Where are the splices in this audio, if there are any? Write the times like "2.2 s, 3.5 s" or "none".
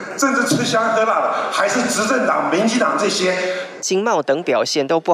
3.8 s